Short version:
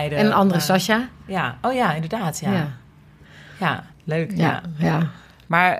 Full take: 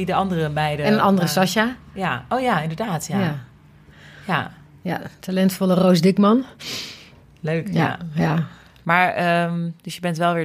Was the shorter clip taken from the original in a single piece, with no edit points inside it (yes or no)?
no